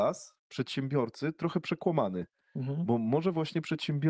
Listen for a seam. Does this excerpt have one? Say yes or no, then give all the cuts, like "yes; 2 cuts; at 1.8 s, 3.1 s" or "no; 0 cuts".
no; 0 cuts